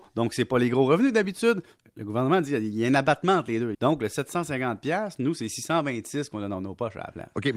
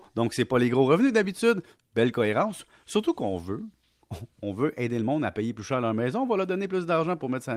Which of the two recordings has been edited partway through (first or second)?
first